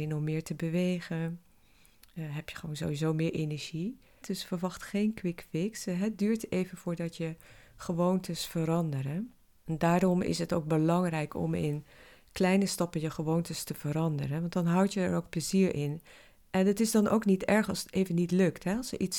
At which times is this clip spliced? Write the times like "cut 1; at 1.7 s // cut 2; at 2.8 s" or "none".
cut 1; at 4.2 s